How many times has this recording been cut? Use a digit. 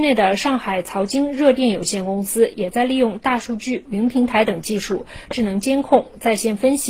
2